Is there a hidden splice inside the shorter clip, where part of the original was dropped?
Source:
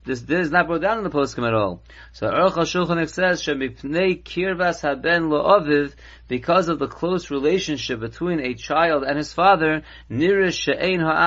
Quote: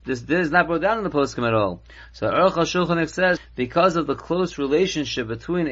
yes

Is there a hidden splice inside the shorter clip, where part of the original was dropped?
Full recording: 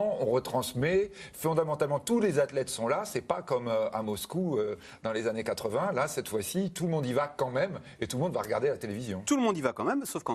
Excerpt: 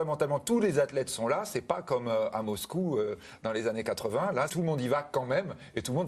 yes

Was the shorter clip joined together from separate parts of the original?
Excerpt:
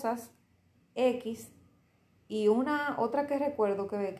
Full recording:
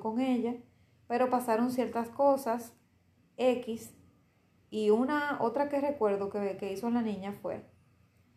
no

